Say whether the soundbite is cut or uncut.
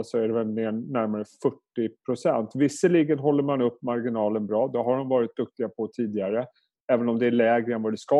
uncut